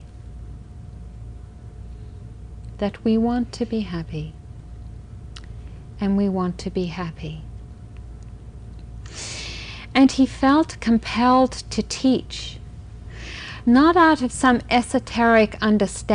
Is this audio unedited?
no; 1 cut; at 5.9 s

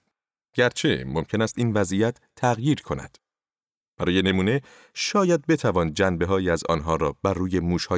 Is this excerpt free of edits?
yes; 0 cuts

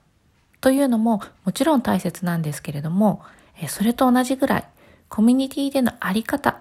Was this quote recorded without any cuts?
yes; 0 cuts

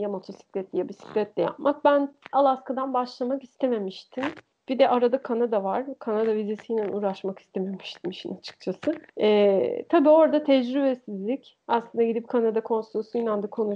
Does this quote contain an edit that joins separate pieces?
yes; 2 cuts; at 4.5 s, 9.1 s

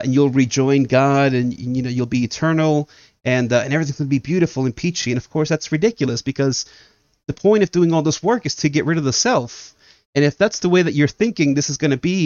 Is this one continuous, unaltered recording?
yes; 0 cuts

